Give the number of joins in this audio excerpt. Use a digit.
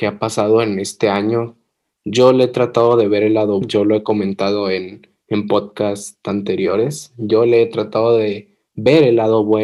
1